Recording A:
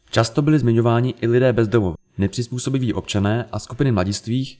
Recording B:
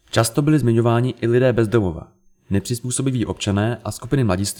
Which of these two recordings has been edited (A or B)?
A